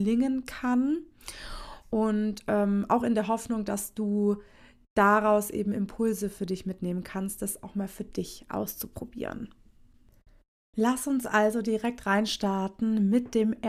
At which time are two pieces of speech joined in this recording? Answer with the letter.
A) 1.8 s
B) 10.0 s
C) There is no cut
C